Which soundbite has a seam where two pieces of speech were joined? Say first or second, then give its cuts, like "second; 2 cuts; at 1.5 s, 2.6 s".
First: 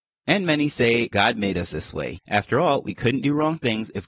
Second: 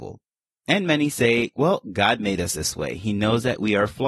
first; 2 cuts; at 1.1 s, 2.1 s